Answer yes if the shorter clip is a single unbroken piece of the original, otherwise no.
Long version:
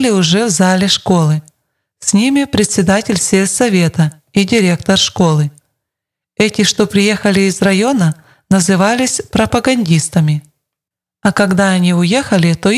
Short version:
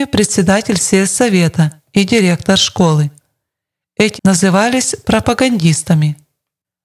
no